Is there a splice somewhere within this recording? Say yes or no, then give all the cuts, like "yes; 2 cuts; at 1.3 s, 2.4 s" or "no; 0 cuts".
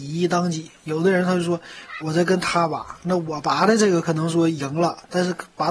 yes; 1 cut; at 2.0 s